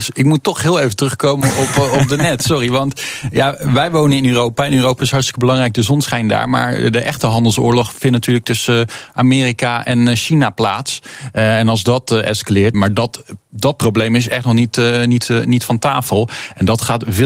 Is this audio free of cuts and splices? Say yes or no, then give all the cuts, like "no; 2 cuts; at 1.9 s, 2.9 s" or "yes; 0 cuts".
no; 1 cut; at 12.7 s